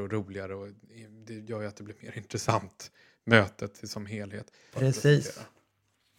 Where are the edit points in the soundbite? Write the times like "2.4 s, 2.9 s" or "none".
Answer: 4.7 s